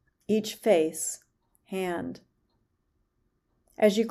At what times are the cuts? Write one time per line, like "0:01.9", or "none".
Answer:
0:01.5